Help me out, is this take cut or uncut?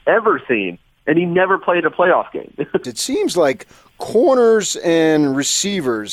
cut